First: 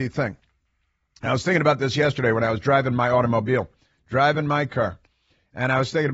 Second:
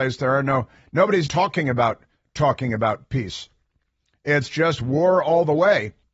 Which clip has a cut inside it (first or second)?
second